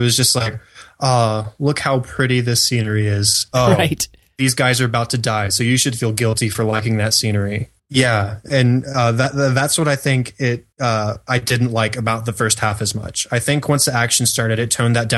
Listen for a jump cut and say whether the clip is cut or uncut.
cut